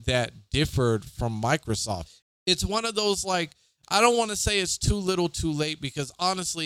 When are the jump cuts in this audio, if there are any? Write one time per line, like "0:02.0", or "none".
0:02.2